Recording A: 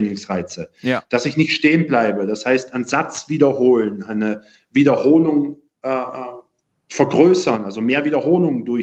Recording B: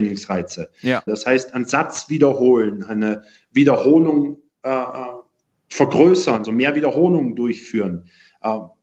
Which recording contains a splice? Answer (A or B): B